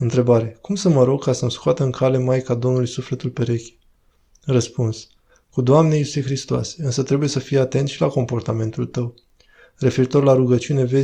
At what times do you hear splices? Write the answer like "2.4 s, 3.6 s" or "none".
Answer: none